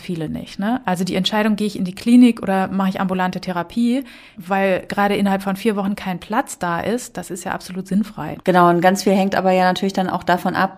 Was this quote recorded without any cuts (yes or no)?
no